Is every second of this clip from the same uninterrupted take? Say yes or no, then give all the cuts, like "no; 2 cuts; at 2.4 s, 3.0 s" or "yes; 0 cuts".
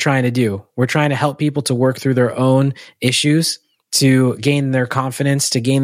yes; 0 cuts